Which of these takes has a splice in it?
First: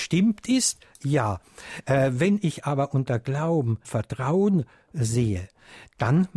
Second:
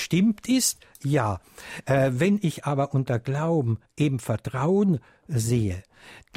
first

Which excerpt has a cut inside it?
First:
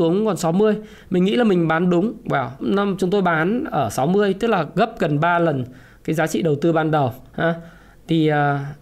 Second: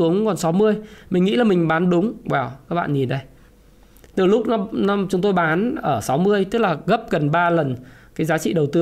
first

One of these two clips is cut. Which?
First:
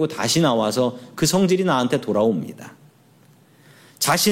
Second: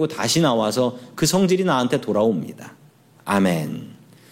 second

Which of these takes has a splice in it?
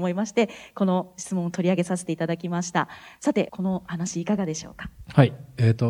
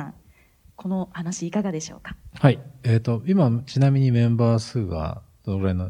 first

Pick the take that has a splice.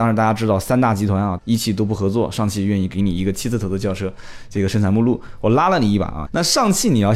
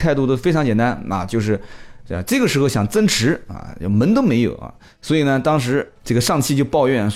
first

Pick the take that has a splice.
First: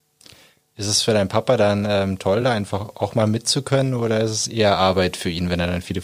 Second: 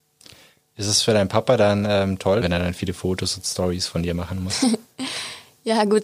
second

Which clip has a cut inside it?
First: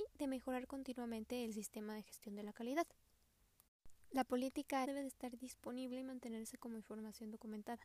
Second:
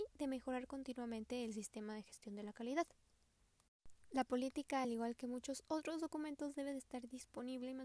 first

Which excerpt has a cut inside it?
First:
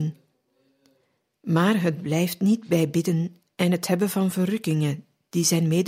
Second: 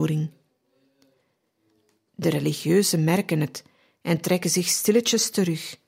first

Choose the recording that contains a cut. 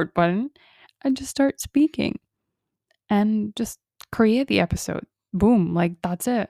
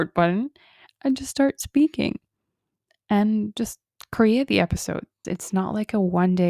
second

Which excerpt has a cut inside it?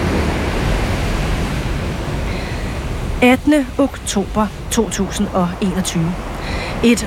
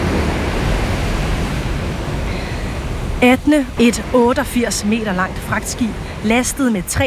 second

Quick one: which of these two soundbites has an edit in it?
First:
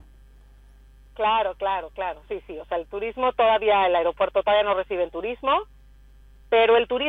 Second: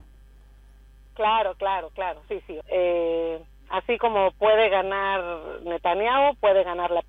second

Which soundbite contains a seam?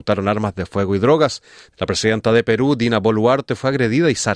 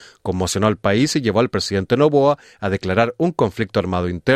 first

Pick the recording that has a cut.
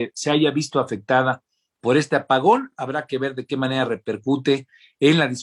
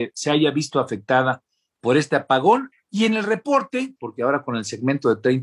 second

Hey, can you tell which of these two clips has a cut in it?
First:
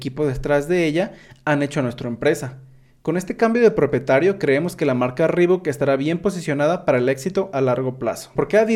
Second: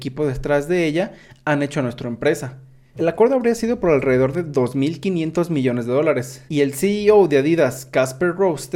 second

